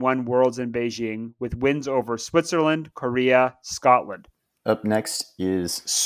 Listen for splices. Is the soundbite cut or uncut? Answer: cut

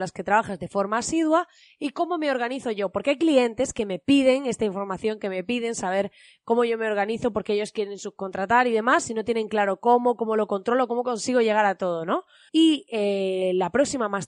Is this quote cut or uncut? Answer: cut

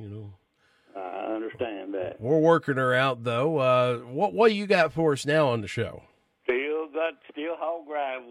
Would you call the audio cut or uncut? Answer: uncut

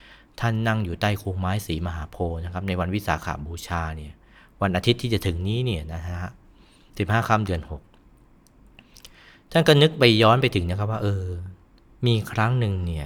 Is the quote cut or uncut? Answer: uncut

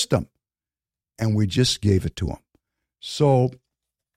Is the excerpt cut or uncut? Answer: uncut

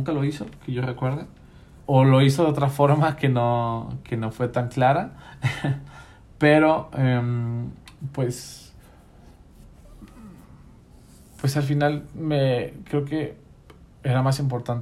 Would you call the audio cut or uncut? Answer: cut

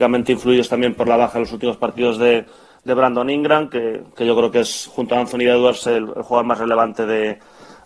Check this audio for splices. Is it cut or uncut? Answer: uncut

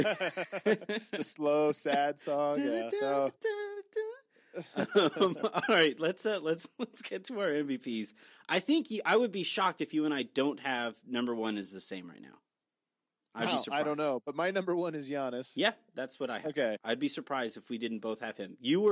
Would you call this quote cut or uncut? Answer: uncut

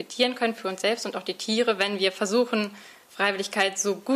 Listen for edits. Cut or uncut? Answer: uncut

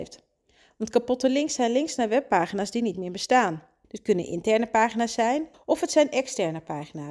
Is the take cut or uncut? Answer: cut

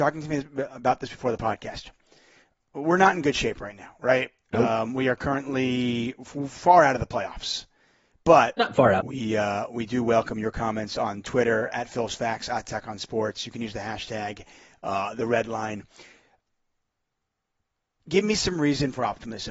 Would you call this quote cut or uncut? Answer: cut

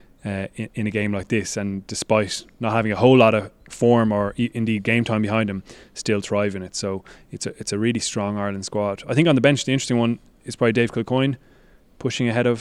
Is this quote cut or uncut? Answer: uncut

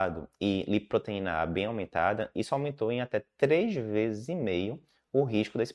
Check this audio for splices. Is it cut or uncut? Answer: uncut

